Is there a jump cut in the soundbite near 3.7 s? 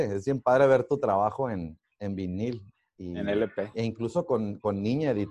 no; 0 cuts

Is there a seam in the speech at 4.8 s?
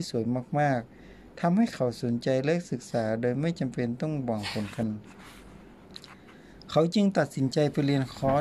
yes; 1 cut; at 4.8 s

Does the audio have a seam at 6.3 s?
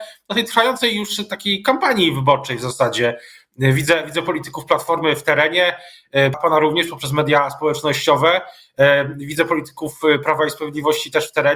yes; 1 cut; at 6.3 s

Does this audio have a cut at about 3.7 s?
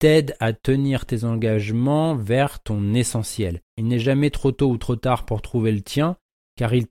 yes; 1 cut; at 3.7 s

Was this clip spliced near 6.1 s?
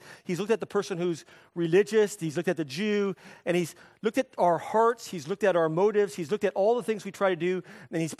no; 0 cuts

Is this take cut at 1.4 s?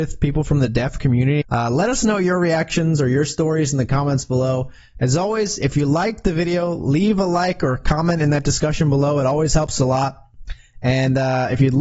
yes; 1 cut; at 1.4 s

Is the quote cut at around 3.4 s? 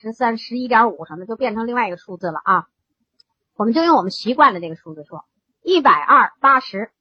no; 1 cut; at 5.5 s

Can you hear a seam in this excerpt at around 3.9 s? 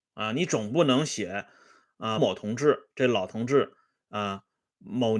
no; 1 cut; at 2.2 s

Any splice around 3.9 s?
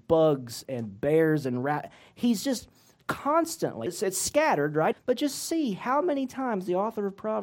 yes; 2 cuts; at 3.9 s, 4.9 s

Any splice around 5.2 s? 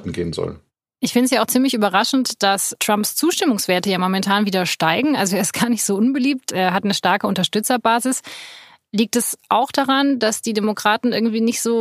no; 0 cuts

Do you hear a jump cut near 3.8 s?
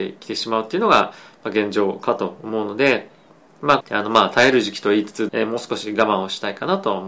yes; 2 cuts; at 3.8 s, 5.3 s

